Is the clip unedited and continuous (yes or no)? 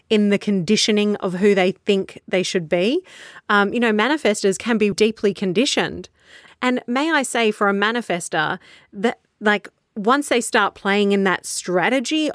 no